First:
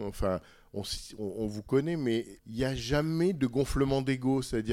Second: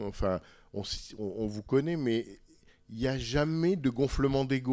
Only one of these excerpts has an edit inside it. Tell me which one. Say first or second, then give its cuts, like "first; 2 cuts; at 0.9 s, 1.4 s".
first; 1 cut; at 2.4 s